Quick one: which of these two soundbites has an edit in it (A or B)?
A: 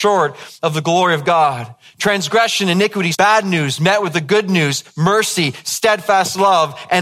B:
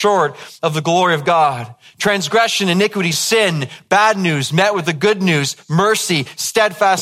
A